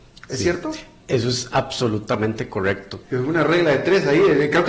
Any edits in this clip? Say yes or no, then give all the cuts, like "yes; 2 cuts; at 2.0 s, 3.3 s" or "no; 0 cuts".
yes; 1 cut; at 3.0 s